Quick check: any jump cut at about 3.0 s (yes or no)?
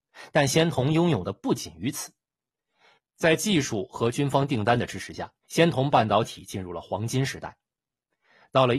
yes